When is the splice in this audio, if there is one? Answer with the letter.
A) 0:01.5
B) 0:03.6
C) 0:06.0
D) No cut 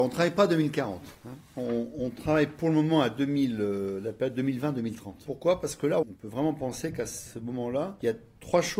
C